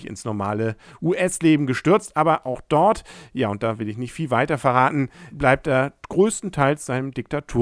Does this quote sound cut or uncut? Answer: cut